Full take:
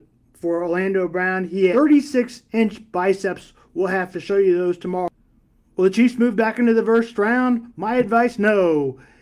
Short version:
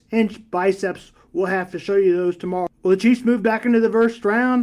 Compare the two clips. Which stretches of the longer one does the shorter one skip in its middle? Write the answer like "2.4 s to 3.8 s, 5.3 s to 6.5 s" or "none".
5.1 s to 5.7 s